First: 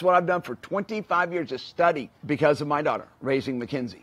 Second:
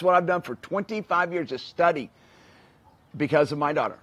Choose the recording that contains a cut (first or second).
first